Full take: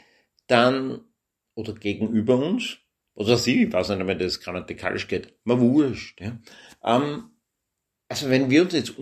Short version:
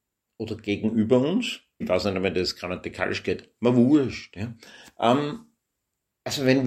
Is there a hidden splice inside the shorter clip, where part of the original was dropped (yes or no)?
yes